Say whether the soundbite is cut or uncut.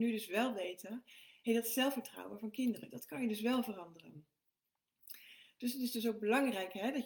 uncut